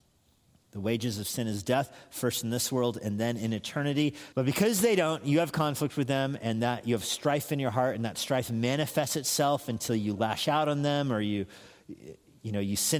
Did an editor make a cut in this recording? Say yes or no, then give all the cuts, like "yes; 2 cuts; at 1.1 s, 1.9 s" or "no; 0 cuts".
yes; 1 cut; at 4.3 s